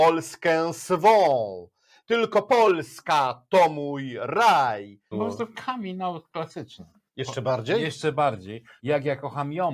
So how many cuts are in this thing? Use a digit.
3